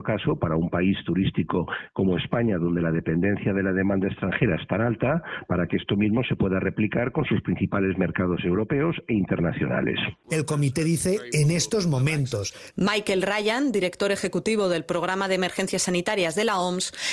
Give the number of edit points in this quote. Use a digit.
2